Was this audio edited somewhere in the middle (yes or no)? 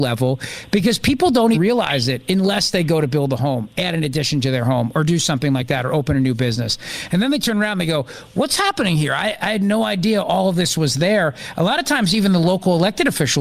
yes